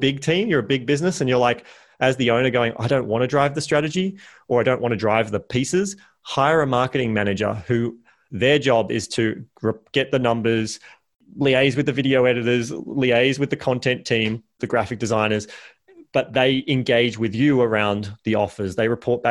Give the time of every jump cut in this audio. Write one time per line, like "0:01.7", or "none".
0:14.6